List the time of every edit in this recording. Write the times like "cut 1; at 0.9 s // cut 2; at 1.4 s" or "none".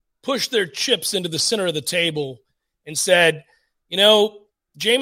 none